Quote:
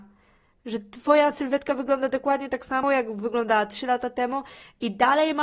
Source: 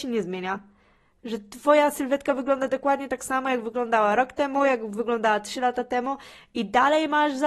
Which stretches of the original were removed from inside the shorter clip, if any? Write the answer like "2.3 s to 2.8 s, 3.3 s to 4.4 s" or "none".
3.4 s to 4.6 s